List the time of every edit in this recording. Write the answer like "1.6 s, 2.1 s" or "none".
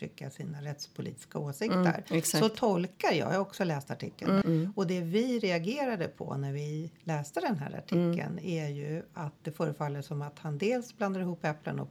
4.4 s